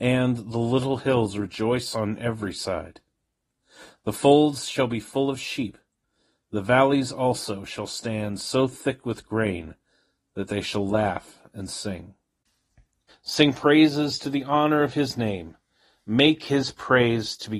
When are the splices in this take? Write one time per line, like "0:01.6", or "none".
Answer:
0:13.1